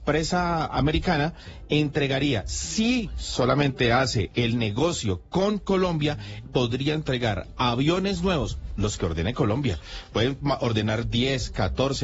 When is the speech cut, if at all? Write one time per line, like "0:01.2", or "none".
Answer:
none